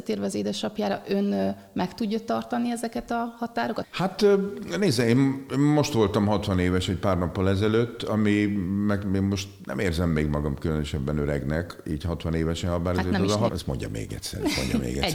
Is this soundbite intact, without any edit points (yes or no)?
no